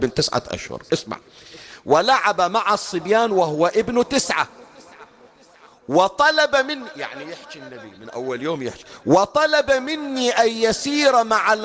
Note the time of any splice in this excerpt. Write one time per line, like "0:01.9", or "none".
none